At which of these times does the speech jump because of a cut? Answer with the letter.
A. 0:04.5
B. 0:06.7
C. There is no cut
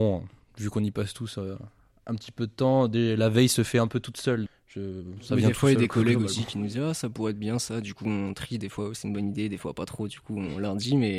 A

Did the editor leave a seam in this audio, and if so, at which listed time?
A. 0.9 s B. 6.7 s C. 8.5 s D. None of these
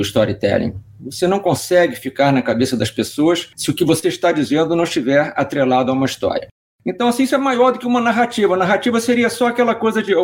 D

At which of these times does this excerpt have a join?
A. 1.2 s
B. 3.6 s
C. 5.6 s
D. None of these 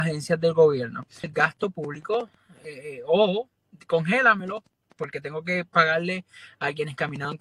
A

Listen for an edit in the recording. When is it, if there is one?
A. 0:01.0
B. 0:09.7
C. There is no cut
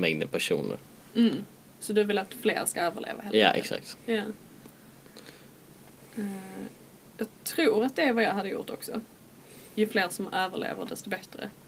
B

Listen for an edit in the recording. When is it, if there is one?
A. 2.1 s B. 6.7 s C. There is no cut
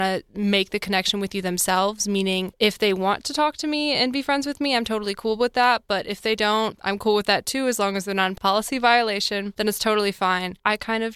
B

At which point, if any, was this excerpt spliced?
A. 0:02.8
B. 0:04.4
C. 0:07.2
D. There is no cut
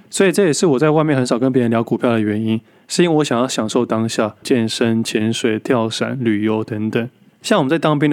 B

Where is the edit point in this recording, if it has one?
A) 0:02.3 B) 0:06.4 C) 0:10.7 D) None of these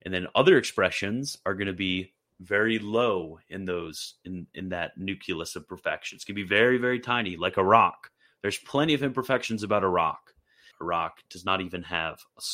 C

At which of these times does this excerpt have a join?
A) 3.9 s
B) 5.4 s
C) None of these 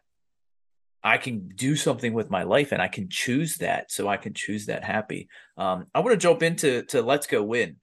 C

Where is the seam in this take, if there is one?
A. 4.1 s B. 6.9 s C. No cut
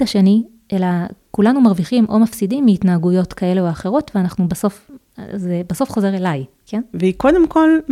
B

